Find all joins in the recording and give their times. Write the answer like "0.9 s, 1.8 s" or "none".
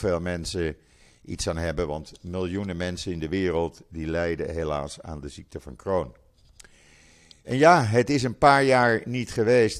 none

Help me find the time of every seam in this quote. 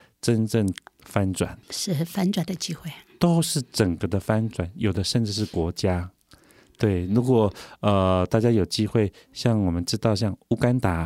1.6 s

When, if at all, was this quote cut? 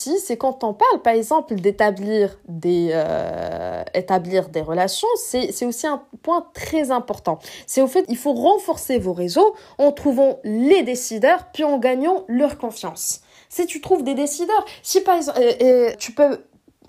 8.1 s, 15.9 s

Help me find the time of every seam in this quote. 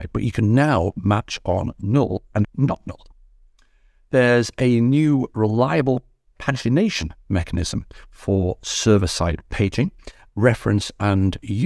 2.4 s, 10.3 s

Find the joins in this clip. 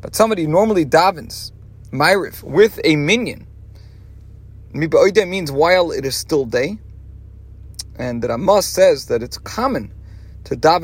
none

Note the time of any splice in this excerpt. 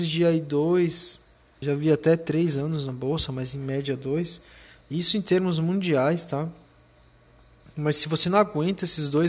1.6 s

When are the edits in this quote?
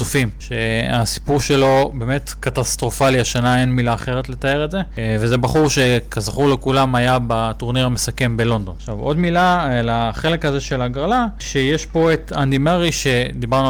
none

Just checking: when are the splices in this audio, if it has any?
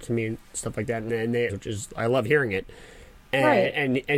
1.5 s

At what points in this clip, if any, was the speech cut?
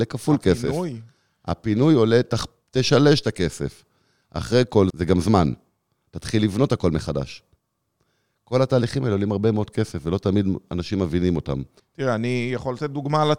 4.9 s, 11.8 s

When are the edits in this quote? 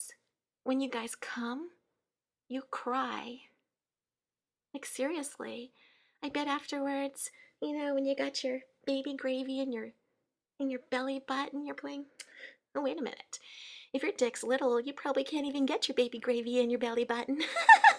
11.8 s

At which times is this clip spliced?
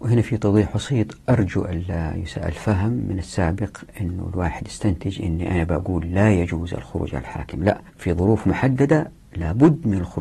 7.9 s

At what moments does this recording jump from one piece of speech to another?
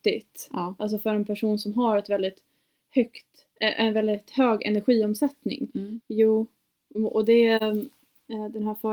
6.0 s

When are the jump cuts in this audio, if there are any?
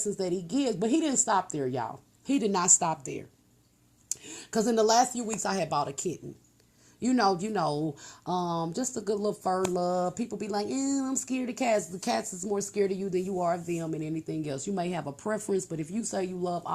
7.4 s

